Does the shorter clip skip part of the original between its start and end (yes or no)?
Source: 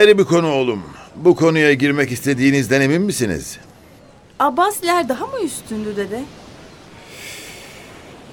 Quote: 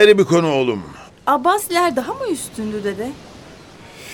yes